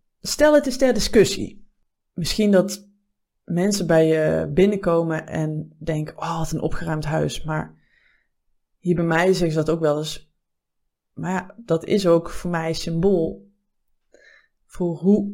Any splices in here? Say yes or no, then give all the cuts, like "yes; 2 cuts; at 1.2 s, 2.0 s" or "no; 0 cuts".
no; 0 cuts